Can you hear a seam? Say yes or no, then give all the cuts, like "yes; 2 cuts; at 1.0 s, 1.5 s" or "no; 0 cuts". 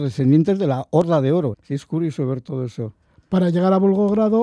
yes; 1 cut; at 1.5 s